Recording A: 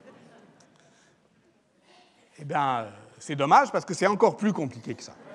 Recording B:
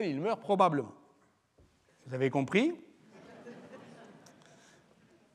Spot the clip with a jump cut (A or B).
B